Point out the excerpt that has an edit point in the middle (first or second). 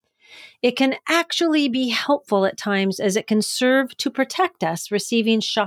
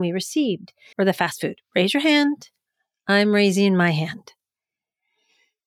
second